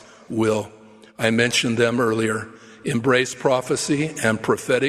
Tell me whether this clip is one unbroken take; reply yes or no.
yes